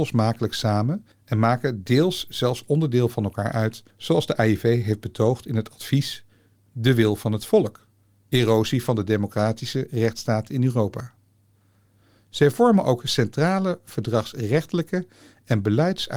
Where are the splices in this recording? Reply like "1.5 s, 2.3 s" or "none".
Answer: none